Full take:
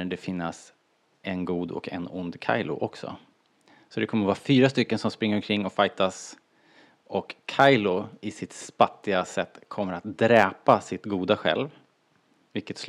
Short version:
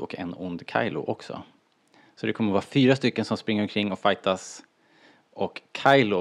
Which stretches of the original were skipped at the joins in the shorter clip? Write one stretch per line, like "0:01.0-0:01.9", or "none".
none